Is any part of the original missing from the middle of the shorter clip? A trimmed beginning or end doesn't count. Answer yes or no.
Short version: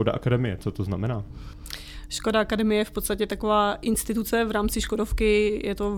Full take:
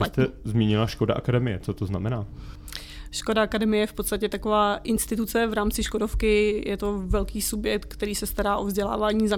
no